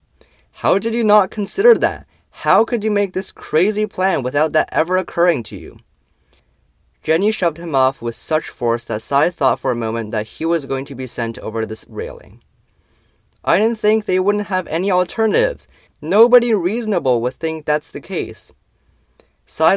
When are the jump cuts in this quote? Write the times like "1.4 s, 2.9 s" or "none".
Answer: 15.9 s